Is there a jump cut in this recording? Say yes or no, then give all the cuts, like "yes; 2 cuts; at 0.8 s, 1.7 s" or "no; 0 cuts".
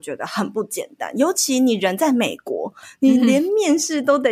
no; 0 cuts